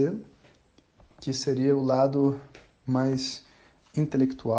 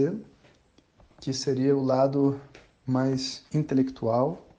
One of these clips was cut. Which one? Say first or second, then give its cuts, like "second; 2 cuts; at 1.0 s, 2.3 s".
second; 1 cut; at 3.5 s